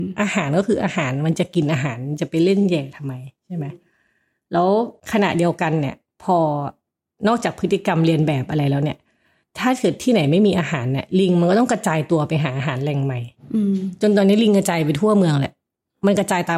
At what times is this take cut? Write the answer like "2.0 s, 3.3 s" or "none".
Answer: 5.0 s

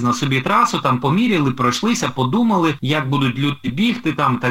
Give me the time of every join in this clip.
none

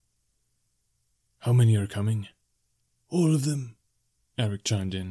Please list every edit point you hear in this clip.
none

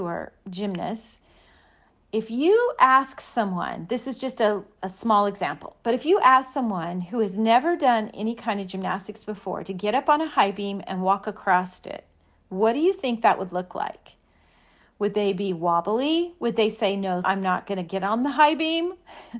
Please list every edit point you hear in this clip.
17.2 s

